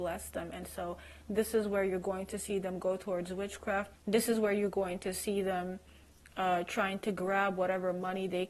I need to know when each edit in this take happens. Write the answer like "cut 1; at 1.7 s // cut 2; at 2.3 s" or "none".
cut 1; at 3.9 s